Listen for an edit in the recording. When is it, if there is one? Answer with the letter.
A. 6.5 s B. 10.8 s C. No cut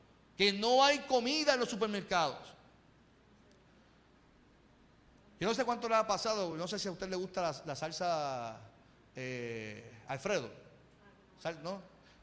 C